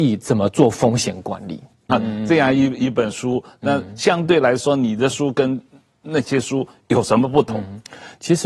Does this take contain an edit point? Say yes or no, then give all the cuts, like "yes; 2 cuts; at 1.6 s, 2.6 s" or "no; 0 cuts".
yes; 1 cut; at 1.9 s